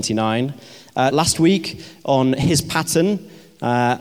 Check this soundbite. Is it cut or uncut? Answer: cut